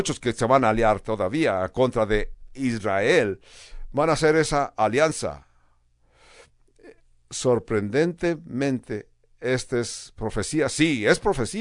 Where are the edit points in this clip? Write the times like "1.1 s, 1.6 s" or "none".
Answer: none